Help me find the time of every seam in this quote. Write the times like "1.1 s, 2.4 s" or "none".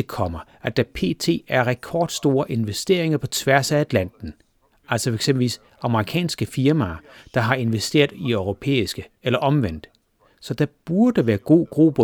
none